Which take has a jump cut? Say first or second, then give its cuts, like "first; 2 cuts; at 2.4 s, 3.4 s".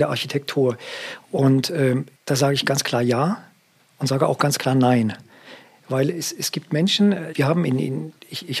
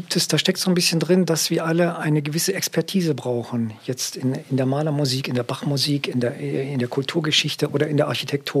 first; 2 cuts; at 2.1 s, 7.3 s